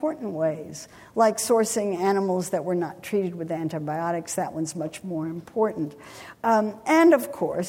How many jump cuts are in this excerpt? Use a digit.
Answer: 1